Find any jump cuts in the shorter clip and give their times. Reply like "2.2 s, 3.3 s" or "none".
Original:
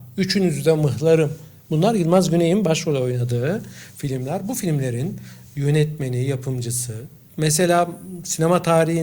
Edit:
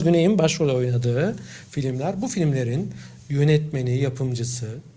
none